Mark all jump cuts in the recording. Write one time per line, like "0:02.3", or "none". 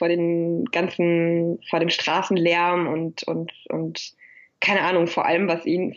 none